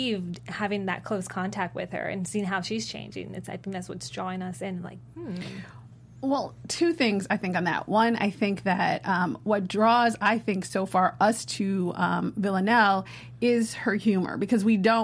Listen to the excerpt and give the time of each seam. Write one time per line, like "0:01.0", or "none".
none